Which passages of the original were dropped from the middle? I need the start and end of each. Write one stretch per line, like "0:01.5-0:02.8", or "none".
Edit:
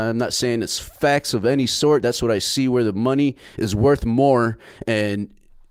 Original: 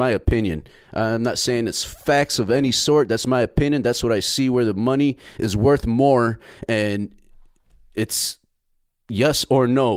0:03.1-0:03.8